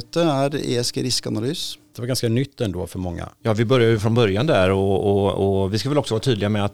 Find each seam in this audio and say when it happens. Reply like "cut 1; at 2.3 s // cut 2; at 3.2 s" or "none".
cut 1; at 1.9 s